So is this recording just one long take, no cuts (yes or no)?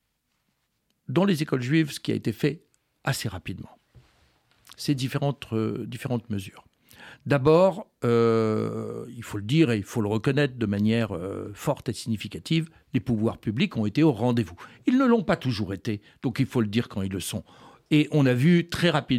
yes